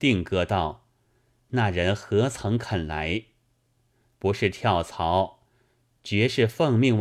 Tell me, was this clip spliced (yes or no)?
no